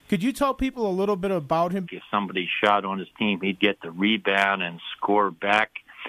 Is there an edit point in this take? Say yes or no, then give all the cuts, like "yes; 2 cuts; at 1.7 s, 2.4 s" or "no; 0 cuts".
yes; 1 cut; at 1.8 s